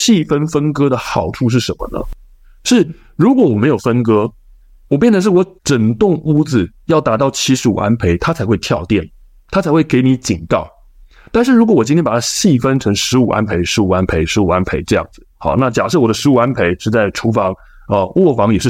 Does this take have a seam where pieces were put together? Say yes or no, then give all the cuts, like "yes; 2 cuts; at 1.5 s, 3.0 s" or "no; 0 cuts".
no; 0 cuts